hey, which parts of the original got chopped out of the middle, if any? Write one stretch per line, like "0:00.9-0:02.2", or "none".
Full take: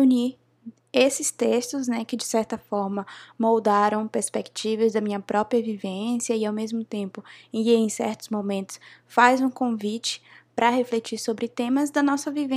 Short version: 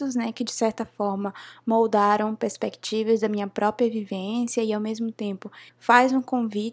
0:07.4-0:09.0